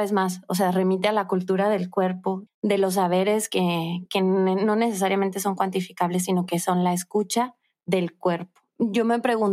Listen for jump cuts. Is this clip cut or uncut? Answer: cut